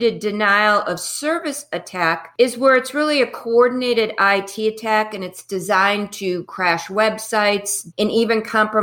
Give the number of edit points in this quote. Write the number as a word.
one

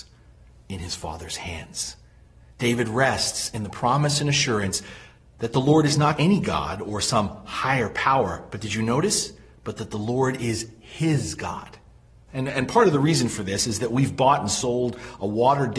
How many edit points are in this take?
two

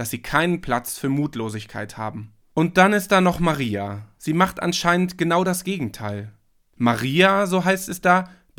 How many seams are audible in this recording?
one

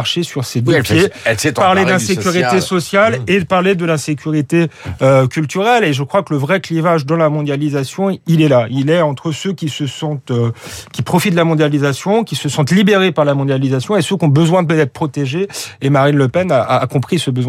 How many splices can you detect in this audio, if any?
zero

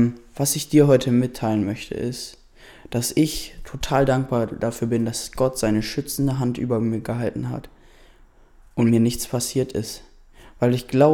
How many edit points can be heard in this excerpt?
zero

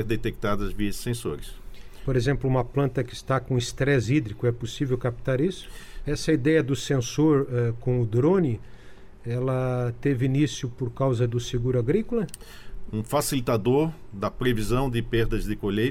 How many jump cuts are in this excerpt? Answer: two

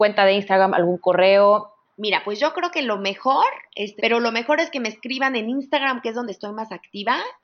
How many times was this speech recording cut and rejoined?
two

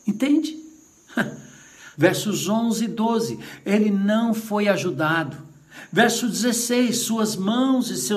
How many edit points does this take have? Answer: one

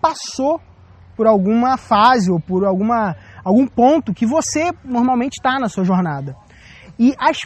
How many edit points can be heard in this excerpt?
zero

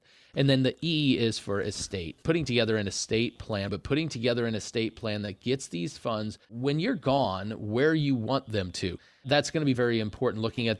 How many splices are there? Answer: three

